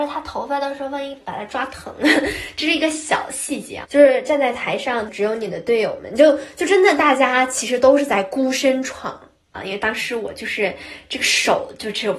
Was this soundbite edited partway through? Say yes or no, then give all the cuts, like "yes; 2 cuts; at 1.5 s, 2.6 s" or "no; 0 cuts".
yes; 3 cuts; at 3.8 s, 5.1 s, 9.5 s